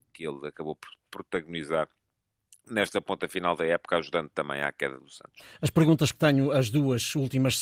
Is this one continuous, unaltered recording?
yes; 0 cuts

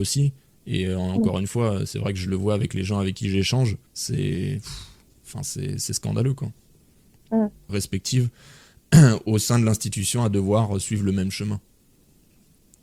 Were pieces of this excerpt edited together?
yes; 2 cuts; at 3.9 s, 7.7 s

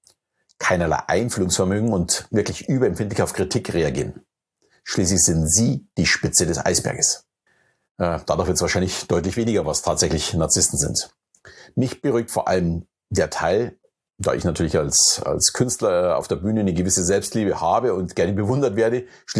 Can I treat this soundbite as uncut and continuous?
yes; 0 cuts

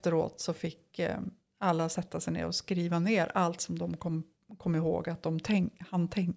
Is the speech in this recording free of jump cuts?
yes; 0 cuts

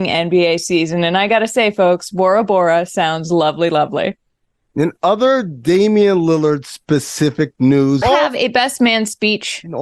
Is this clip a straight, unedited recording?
no; 1 cut; at 8.0 s

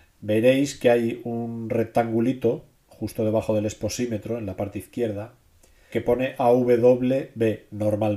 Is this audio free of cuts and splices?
no; 1 cut; at 5.9 s

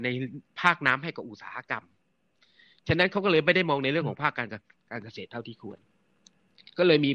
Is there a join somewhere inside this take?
no; 0 cuts

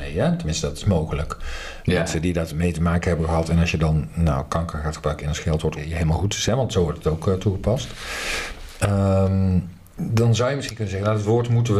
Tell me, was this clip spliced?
yes; 1 cut; at 5.8 s

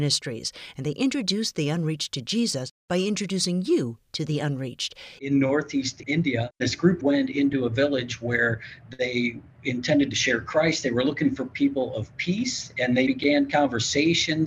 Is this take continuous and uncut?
no; 1 cut; at 5.2 s

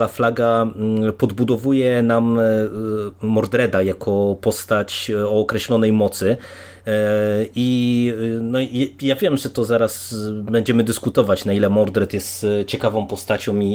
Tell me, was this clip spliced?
no; 0 cuts

